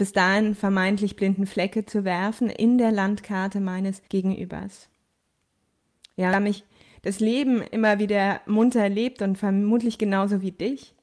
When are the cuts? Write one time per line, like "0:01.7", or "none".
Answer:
0:04.1

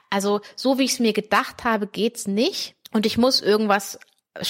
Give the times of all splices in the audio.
0:02.8

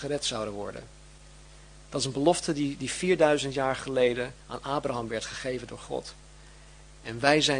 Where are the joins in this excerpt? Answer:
none

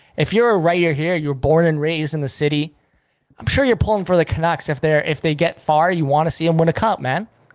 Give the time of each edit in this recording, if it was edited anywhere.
none

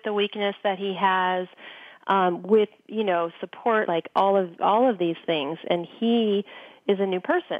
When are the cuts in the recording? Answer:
0:03.9

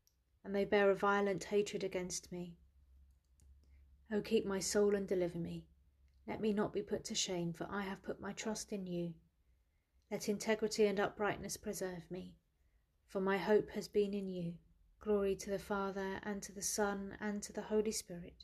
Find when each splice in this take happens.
0:15.0

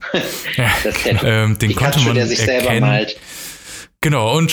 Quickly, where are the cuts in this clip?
0:01.2

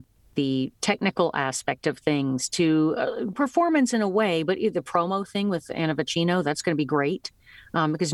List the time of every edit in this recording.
0:03.3

